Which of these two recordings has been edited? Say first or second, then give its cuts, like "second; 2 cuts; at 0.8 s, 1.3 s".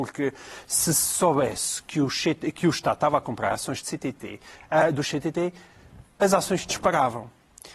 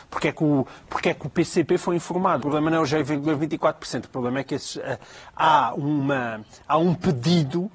second; 1 cut; at 2.4 s